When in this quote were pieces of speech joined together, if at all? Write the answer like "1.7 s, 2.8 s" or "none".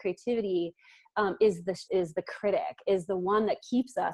1.9 s